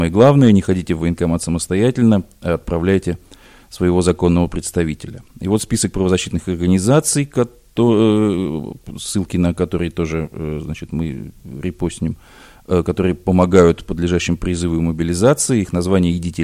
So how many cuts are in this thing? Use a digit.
0